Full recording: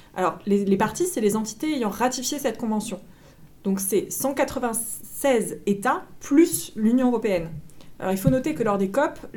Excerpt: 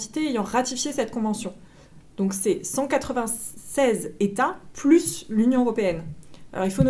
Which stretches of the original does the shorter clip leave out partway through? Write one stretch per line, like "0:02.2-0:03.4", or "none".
none